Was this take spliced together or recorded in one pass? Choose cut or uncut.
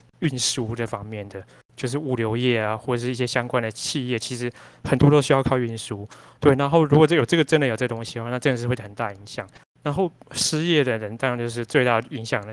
uncut